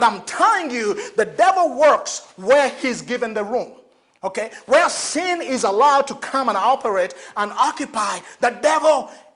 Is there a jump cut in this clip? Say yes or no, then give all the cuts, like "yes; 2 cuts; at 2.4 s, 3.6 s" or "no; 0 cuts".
no; 0 cuts